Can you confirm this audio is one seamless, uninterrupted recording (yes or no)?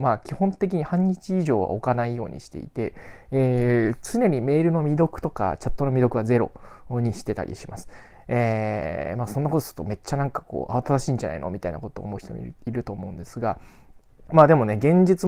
yes